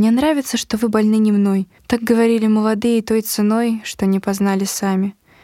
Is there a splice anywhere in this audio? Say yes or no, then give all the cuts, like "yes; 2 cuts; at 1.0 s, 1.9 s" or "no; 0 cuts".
yes; 1 cut; at 1.8 s